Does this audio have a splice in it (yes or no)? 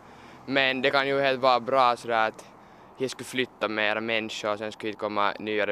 no